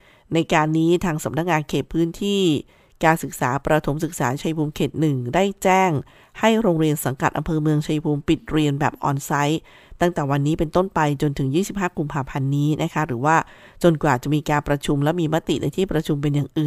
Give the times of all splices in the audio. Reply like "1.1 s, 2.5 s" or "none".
none